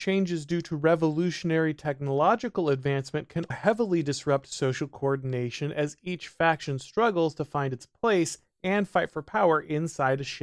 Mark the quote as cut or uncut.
cut